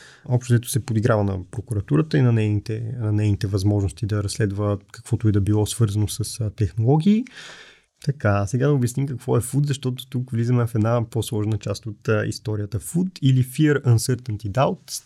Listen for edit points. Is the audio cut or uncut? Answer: cut